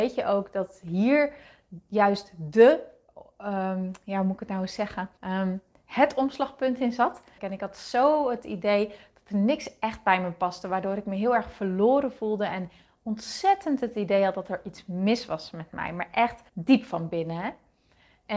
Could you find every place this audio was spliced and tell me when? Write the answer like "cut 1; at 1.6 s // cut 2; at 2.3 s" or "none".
cut 1; at 5.2 s // cut 2; at 7.4 s // cut 3; at 16.5 s

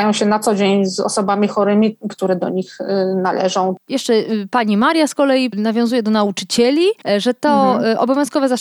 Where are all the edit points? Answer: cut 1; at 2.1 s

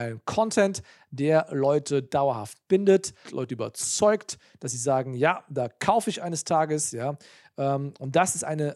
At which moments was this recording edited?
cut 1; at 3.3 s

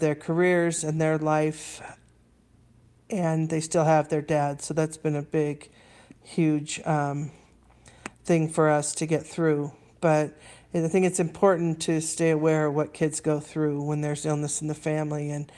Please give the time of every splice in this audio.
none

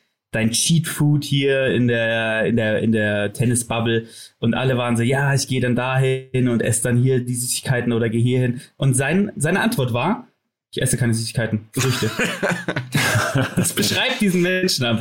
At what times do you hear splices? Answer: none

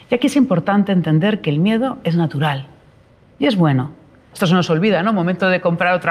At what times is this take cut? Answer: cut 1; at 4.3 s

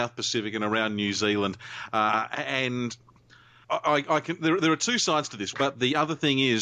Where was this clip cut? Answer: cut 1; at 3.6 s // cut 2; at 5.5 s

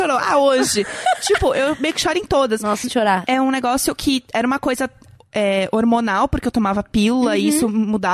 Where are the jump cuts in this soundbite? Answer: cut 1; at 2.8 s

